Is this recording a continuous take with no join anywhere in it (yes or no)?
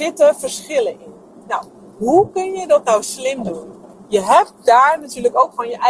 yes